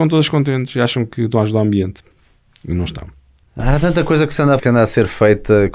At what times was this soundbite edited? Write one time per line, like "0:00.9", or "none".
0:03.4
0:04.6